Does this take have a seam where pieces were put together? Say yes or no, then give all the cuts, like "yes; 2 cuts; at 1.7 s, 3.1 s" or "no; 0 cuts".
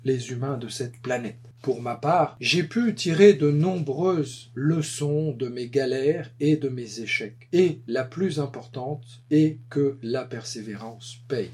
yes; 1 cut; at 1.5 s